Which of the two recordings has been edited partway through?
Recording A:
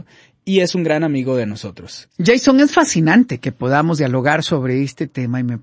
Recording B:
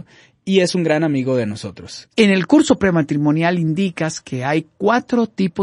B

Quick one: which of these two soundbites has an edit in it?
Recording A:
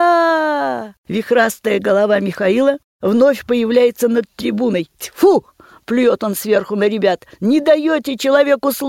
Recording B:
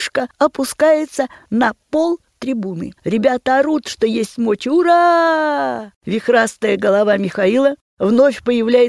B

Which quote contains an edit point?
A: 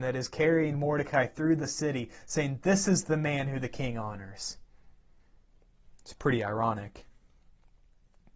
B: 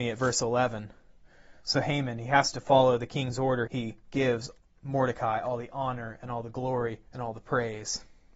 B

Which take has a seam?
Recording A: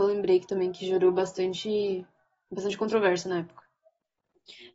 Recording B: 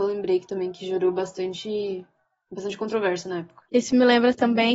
B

